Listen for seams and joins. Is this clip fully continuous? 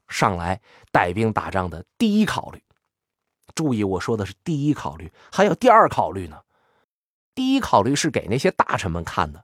yes; 0 cuts

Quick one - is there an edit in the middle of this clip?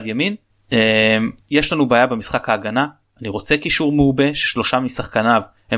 no; 0 cuts

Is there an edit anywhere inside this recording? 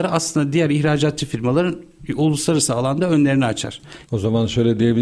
yes; 1 cut; at 4.0 s

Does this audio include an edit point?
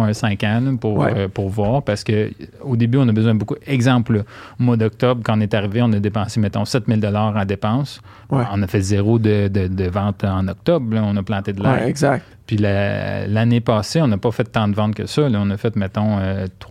no; 0 cuts

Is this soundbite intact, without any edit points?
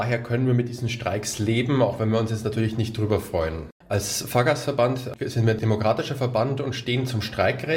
no; 1 cut; at 3.8 s

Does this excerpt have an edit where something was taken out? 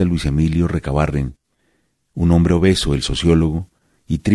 no; 0 cuts

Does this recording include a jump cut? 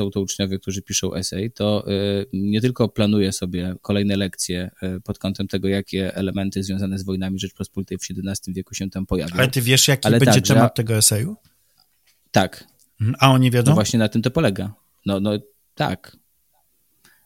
no; 0 cuts

